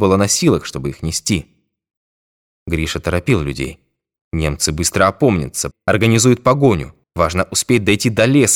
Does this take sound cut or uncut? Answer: cut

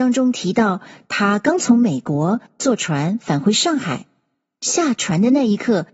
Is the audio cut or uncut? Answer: uncut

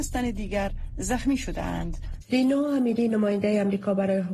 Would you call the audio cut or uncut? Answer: cut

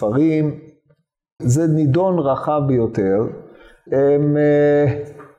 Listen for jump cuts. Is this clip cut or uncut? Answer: cut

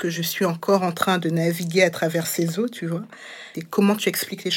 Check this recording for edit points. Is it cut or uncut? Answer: cut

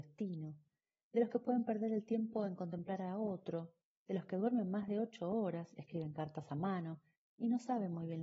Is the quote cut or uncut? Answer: uncut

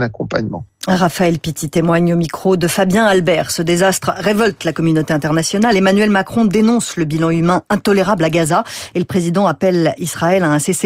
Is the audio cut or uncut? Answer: uncut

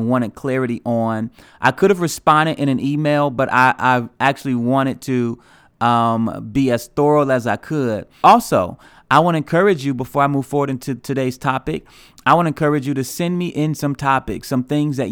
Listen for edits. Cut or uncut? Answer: cut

